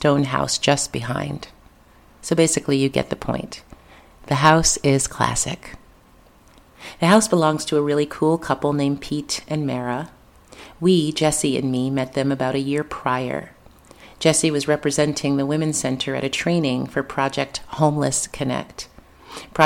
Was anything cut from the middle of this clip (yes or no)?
no